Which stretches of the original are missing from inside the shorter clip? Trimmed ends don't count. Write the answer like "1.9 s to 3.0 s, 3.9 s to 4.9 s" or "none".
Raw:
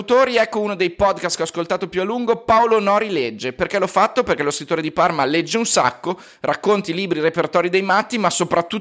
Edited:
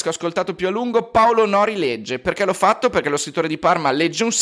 none

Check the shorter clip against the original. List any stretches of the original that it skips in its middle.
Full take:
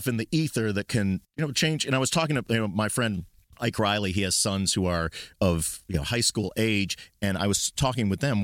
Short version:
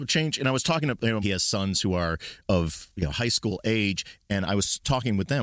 2.7 s to 4.1 s

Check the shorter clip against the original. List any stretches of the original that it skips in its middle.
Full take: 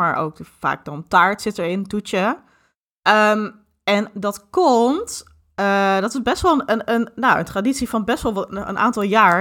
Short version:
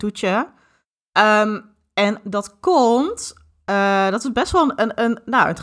none

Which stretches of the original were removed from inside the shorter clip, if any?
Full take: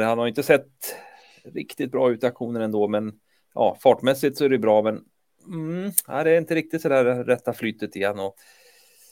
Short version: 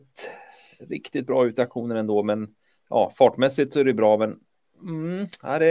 none

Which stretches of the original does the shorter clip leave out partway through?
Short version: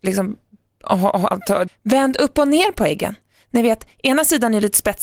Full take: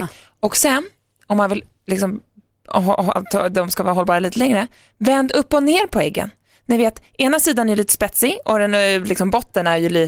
3.5 s to 4.8 s

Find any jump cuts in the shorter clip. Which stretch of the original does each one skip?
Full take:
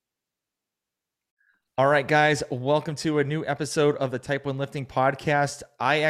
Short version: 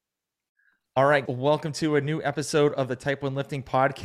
2.1 s to 2.5 s

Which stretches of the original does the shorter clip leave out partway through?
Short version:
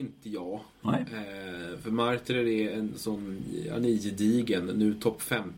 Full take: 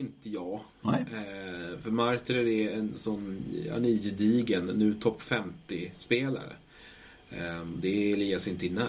none

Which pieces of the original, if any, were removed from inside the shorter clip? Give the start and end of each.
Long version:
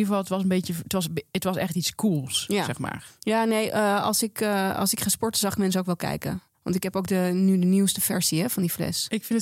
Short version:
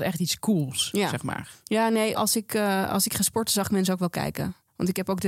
3.7 s to 4.0 s

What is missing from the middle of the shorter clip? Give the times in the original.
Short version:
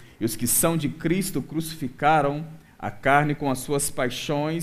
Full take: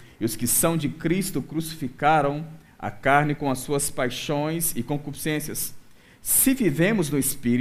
none

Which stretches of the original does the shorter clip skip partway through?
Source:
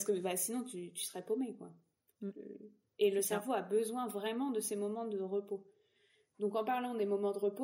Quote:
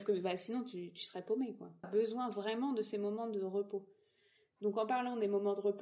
1.8 s to 3.6 s

